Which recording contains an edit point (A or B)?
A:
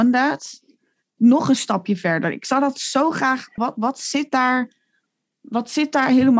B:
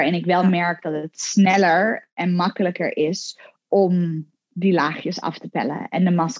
A